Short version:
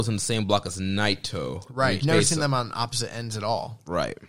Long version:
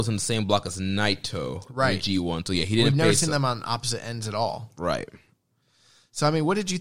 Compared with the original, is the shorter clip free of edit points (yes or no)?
no